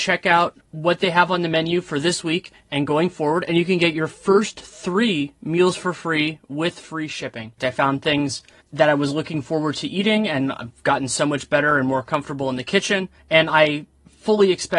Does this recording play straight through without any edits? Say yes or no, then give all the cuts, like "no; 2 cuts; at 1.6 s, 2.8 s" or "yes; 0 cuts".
no; 1 cut; at 7.6 s